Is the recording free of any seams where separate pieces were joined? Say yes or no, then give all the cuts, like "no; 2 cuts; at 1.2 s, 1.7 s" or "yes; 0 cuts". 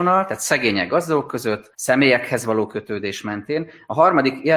no; 1 cut; at 1.7 s